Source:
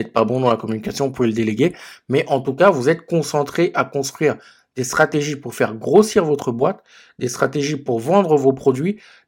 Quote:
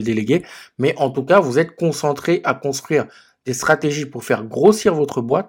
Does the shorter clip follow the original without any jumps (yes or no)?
yes